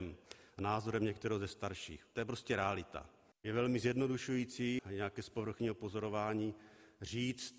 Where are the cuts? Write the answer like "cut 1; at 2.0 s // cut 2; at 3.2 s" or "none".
cut 1; at 3.3 s // cut 2; at 4.8 s